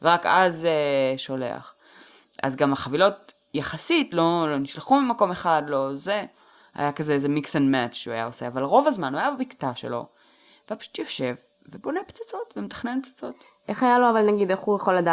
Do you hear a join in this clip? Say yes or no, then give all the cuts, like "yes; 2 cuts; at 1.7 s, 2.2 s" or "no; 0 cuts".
no; 0 cuts